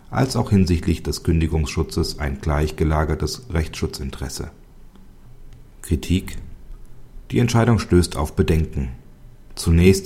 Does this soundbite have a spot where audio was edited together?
no; 0 cuts

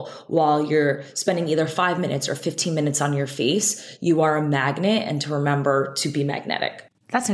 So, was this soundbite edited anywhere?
no; 0 cuts

